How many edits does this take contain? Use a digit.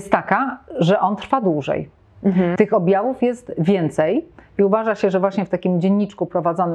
1